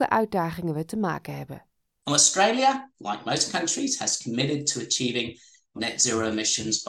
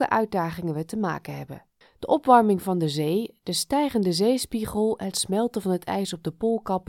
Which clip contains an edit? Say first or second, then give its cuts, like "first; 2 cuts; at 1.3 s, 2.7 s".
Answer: second; 1 cut; at 1.8 s